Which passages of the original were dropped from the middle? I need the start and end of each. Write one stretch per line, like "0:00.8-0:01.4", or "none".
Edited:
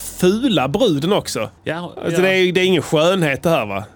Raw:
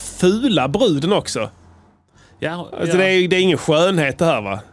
0:01.6-0:02.3